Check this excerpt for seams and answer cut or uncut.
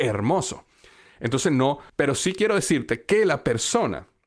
cut